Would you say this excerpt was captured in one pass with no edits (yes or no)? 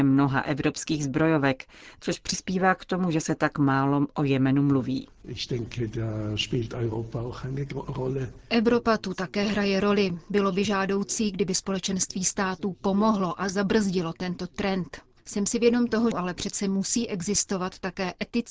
no